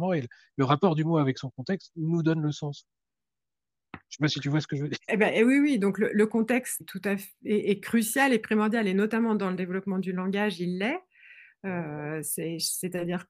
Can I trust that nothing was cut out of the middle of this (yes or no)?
no